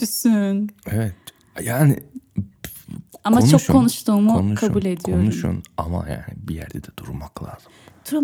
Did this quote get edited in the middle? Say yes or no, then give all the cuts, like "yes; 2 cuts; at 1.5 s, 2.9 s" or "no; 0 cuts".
no; 0 cuts